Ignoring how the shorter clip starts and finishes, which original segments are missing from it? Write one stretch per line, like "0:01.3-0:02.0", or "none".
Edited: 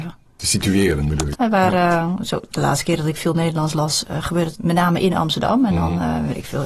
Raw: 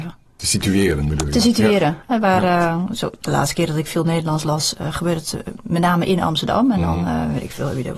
0:01.3-0:02.0
0:05.3-0:05.6

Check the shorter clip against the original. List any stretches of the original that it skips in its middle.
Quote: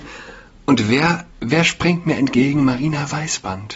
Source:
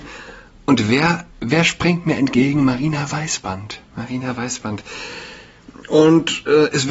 none

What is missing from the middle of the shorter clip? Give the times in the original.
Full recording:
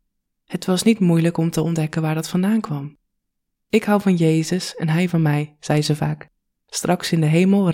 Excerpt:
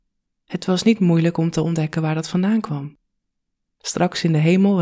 0:03.6-0:06.5

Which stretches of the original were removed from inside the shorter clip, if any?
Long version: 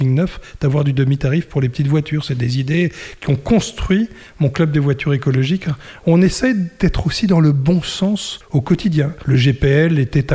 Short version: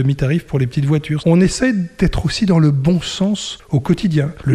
0:02.2-0:06.0

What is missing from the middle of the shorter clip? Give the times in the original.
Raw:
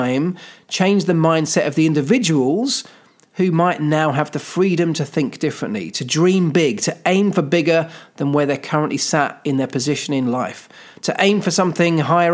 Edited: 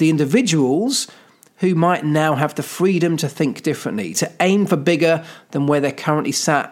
0:05.9-0:06.8

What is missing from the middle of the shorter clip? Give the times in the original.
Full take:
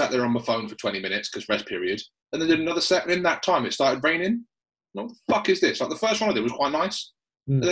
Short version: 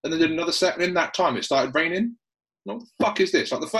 none

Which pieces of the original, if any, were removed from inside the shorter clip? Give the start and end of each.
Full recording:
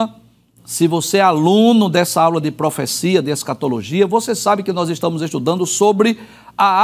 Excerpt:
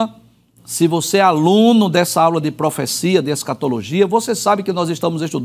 none

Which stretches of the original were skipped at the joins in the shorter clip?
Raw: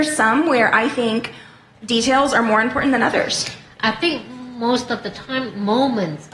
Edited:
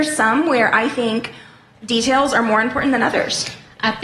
none

